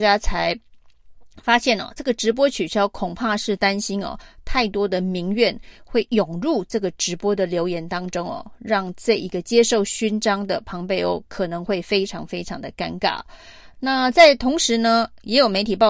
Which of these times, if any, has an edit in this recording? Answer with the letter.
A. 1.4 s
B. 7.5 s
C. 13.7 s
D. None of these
C